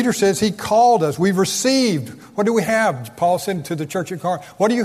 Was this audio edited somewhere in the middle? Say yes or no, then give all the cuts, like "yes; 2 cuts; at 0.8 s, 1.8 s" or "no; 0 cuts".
no; 0 cuts